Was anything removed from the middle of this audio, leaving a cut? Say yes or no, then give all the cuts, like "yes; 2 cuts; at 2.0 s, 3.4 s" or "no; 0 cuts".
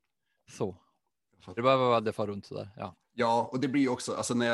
yes; 1 cut; at 1.6 s